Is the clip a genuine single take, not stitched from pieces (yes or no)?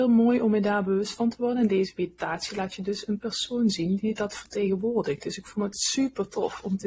yes